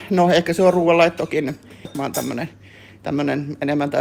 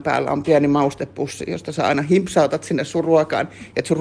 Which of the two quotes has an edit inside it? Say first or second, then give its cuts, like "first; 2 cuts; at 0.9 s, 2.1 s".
first; 1 cut; at 1.9 s